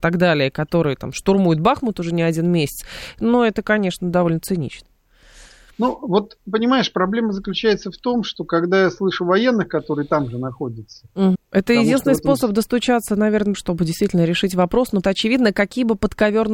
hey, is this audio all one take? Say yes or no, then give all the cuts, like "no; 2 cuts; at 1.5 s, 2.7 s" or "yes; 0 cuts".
no; 3 cuts; at 11.3 s, 13.5 s, 15.0 s